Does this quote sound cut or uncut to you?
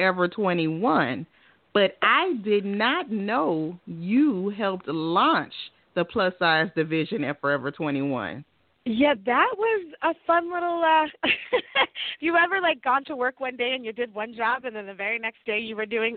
cut